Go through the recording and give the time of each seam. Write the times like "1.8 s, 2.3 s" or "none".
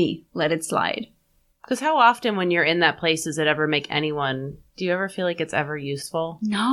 none